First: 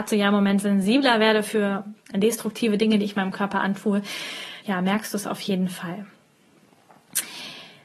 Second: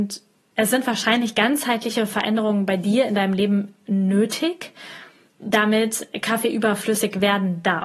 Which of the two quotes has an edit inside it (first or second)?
first